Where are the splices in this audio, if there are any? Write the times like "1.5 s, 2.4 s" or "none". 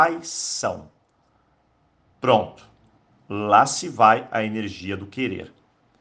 none